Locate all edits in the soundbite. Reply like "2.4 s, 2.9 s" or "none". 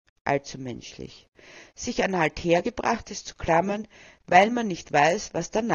none